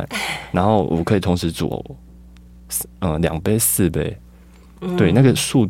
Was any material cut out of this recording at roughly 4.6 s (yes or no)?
no